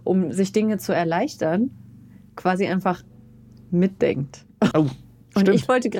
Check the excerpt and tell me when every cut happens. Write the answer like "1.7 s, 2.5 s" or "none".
4.7 s

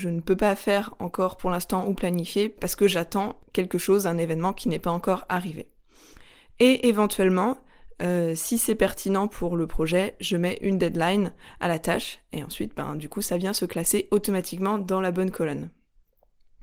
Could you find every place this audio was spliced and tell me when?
none

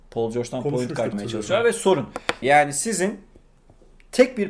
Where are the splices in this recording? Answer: 1.1 s, 2.4 s

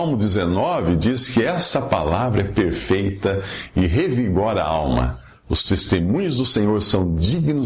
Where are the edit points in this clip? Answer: none

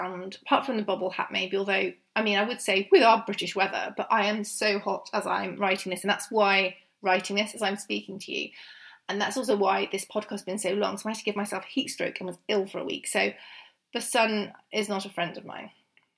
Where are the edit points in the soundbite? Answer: none

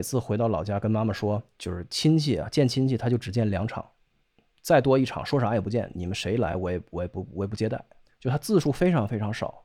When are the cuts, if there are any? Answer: 8.0 s

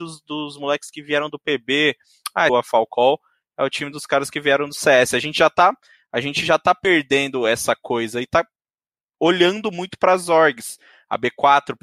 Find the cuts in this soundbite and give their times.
2.5 s

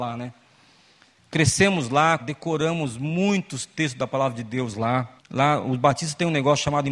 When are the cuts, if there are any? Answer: 1.2 s, 2.2 s, 5.2 s

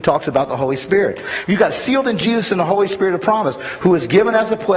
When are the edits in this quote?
1.4 s

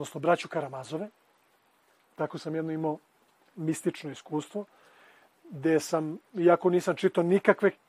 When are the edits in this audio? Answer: 2.1 s

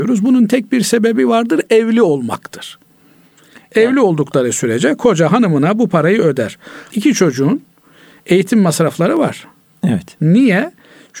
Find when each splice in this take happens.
6.9 s, 10.2 s

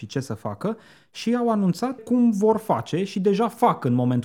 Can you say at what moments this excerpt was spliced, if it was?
2.0 s

